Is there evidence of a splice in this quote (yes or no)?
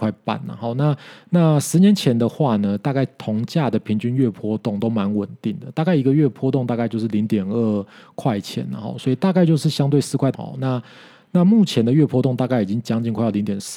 yes